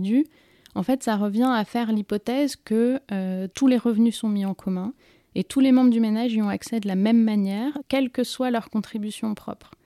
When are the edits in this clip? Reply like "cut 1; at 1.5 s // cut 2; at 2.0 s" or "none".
cut 1; at 3.5 s // cut 2; at 7.8 s

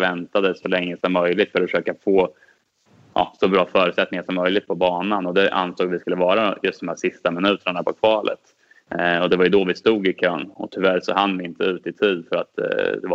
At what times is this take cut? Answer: none

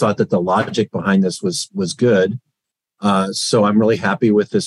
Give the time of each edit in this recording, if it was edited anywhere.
none

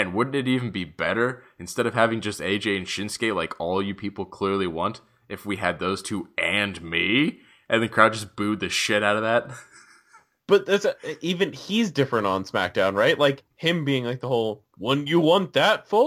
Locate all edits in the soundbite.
cut 1; at 13.5 s

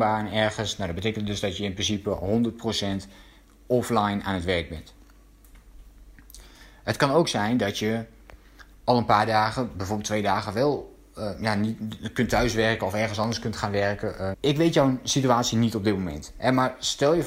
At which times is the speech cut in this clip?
cut 1; at 14.3 s

